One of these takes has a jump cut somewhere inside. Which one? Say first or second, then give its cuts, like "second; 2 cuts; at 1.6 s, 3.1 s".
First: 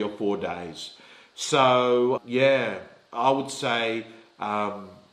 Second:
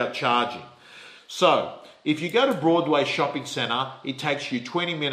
first; 1 cut; at 2.2 s